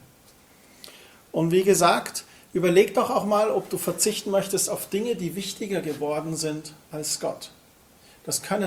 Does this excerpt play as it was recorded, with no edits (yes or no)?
yes